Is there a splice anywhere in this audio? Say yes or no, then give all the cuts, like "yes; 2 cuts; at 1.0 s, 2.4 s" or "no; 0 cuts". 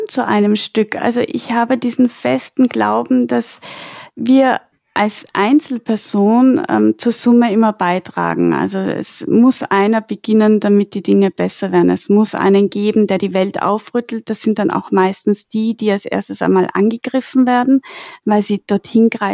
no; 0 cuts